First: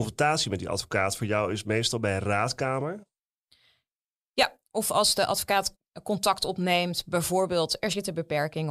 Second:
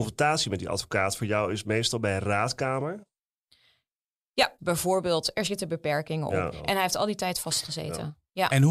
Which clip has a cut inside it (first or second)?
second